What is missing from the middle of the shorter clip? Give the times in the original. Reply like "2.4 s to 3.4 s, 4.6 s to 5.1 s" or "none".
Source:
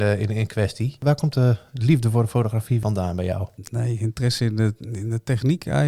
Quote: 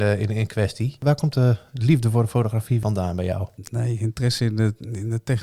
none